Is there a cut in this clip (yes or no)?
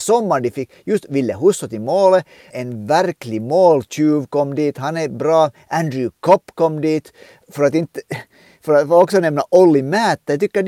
yes